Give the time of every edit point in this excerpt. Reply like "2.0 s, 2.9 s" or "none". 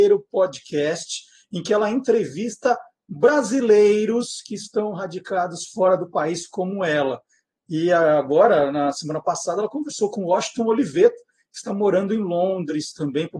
none

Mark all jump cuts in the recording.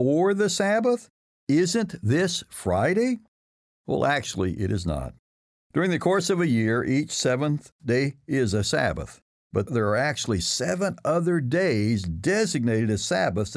none

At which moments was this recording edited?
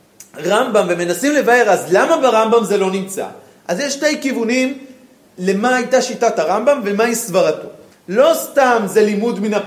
7.9 s

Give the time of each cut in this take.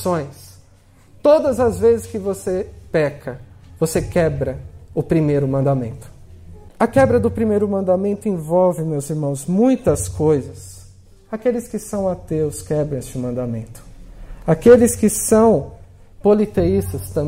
6.7 s

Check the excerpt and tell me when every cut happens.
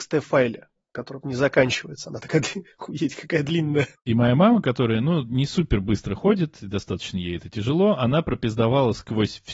1.2 s, 3.9 s

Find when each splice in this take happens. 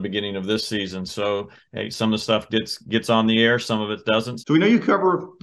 1.1 s, 4.4 s

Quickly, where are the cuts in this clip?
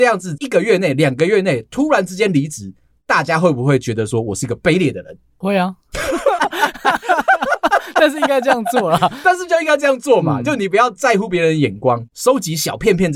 6.4 s, 12.1 s

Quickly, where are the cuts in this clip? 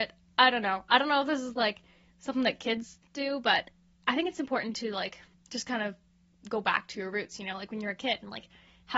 none

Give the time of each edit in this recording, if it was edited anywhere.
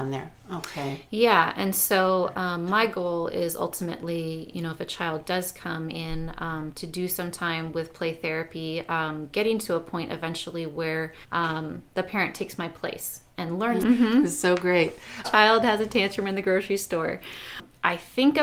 11.2 s, 13.8 s, 15.2 s

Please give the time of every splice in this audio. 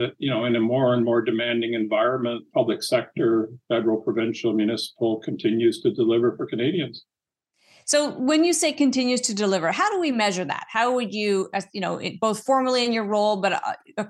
none

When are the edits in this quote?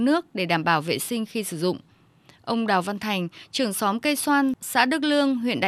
none

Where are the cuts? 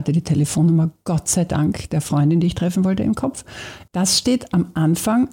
3.9 s

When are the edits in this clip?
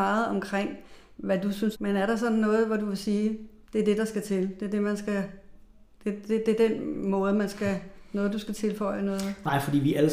1.7 s

